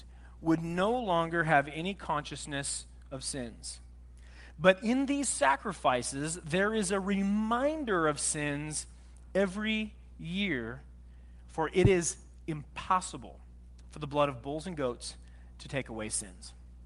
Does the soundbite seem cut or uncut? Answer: uncut